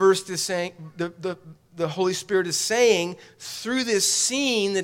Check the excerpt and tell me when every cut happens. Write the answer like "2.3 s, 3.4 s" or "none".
none